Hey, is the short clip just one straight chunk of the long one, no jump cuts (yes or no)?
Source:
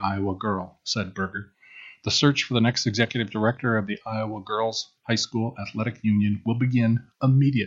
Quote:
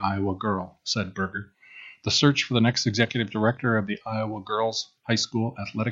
yes